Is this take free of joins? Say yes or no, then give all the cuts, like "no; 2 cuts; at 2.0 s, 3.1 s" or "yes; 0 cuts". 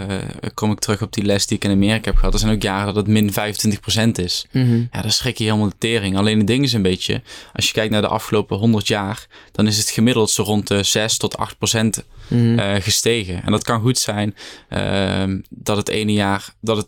yes; 0 cuts